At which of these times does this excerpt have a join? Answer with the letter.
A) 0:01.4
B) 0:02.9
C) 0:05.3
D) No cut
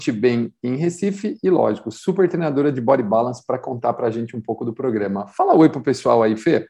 D